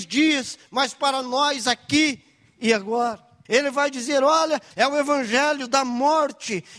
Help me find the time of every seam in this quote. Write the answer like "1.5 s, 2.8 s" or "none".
3.5 s, 4.7 s